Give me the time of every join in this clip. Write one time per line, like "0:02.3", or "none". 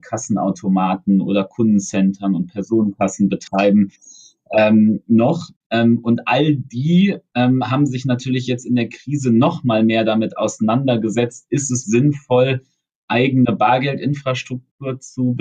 0:11.8

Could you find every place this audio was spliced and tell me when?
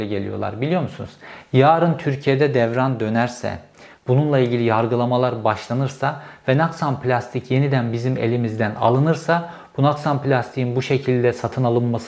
0:03.9

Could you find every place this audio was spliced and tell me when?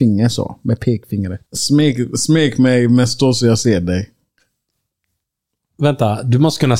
0:01.5

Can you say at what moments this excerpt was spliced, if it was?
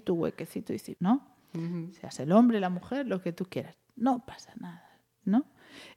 0:01.0

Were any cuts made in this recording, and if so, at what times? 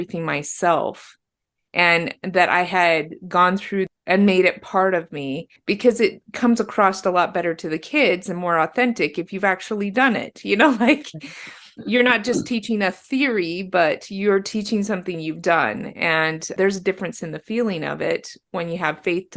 none

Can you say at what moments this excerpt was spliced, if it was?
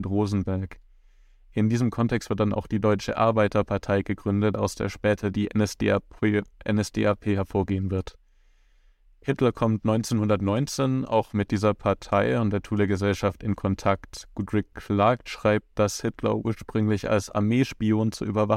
none

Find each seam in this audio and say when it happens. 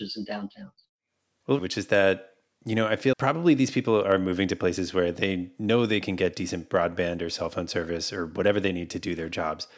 0:01.6
0:03.1

